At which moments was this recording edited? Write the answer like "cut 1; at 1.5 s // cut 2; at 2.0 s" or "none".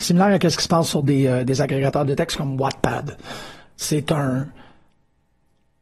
cut 1; at 3.7 s